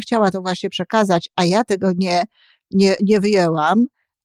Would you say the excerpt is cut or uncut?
uncut